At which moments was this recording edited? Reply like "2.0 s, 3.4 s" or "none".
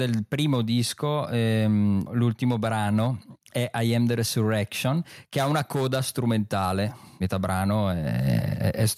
none